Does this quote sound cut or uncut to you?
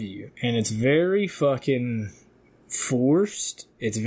uncut